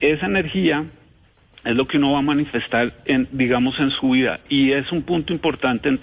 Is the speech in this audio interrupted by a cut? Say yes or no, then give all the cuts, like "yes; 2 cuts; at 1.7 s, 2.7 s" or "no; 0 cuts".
no; 0 cuts